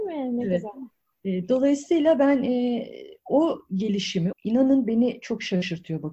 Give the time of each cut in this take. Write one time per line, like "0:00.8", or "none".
0:04.3